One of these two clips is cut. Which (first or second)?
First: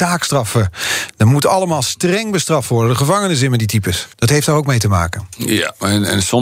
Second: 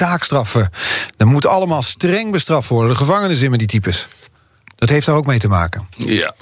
first